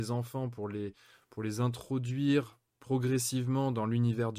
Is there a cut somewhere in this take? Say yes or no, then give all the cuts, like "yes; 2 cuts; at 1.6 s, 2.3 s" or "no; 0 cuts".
no; 0 cuts